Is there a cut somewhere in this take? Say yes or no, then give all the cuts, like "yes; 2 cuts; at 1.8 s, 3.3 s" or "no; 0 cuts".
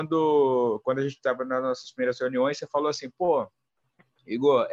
no; 0 cuts